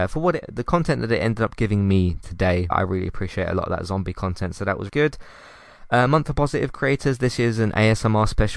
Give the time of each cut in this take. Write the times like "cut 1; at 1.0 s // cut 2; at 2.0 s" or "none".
cut 1; at 2.7 s // cut 2; at 4.9 s